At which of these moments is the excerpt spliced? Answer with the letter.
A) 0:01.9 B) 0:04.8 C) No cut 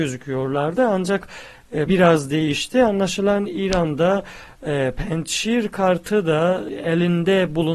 A